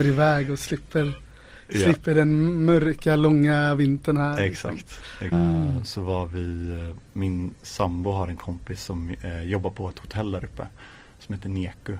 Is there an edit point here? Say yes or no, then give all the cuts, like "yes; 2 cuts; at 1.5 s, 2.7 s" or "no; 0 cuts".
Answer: yes; 1 cut; at 5.3 s